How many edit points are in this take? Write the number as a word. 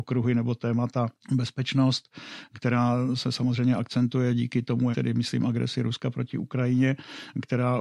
two